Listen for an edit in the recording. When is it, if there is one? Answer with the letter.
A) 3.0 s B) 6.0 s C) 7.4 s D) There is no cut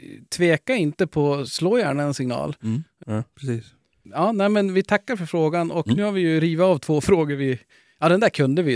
A